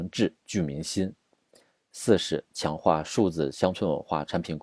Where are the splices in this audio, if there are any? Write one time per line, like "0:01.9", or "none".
0:01.8